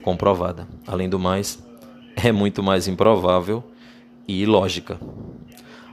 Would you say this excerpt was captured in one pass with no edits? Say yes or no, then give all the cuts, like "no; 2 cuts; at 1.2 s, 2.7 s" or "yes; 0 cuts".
yes; 0 cuts